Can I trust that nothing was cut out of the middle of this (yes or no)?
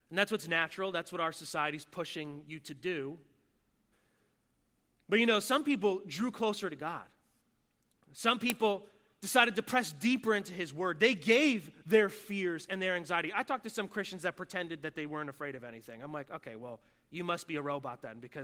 no